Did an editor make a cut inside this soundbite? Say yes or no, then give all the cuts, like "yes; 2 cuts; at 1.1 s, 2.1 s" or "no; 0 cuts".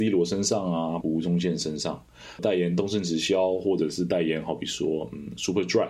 yes; 2 cuts; at 1.0 s, 2.4 s